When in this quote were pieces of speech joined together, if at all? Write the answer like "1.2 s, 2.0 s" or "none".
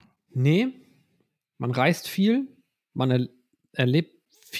none